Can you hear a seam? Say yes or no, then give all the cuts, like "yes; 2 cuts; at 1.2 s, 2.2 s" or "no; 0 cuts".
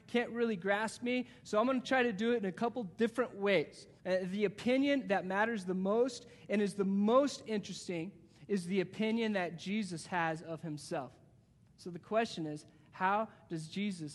yes; 1 cut; at 4.0 s